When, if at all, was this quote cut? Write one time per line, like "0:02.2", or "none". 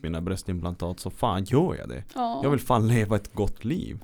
none

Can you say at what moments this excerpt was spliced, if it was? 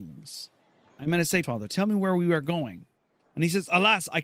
0:01.4

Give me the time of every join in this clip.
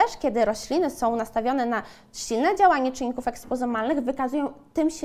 none

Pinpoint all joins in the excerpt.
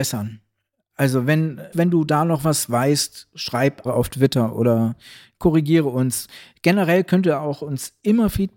0:01.7
0:03.9

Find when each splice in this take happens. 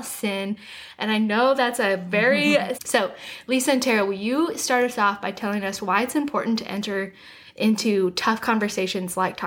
0:02.7

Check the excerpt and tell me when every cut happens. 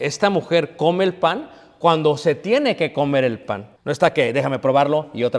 0:03.8

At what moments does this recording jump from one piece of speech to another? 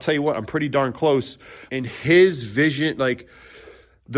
0:01.7

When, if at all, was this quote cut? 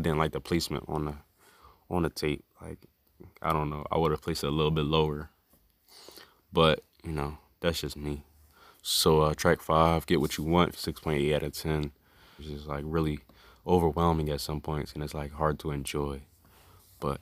0:10.7
0:12.4

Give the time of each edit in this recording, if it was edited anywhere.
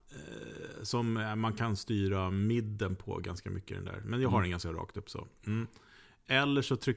none

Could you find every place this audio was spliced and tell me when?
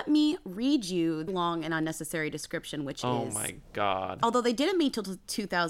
0:01.3

